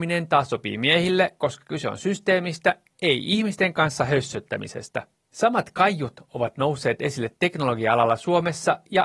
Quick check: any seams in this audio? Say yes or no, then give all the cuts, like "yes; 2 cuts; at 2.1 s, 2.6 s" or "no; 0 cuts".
yes; 1 cut; at 5.1 s